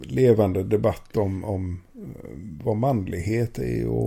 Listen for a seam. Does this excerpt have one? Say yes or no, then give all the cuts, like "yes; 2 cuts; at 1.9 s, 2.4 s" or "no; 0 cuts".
no; 0 cuts